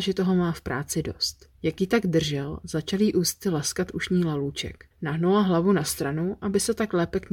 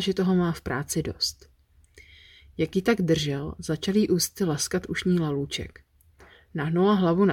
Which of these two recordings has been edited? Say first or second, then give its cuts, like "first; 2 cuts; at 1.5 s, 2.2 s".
first; 2 cuts; at 1.5 s, 4.9 s